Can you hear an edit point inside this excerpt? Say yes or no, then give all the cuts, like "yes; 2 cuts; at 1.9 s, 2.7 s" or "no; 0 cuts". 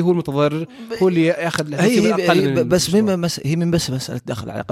no; 0 cuts